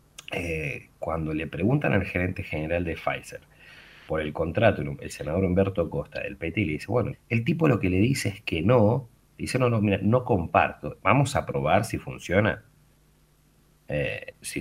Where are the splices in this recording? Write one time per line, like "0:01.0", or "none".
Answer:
0:07.1
0:11.0